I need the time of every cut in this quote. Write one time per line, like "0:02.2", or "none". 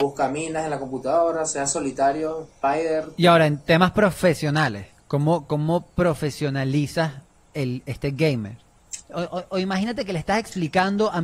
0:09.0